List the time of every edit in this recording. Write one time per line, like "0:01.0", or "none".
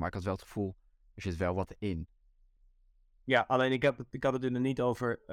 none